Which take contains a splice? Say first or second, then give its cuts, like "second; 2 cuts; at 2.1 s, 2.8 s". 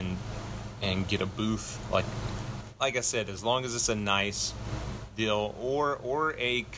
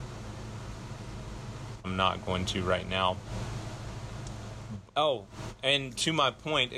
second; 2 cuts; at 1.8 s, 4.9 s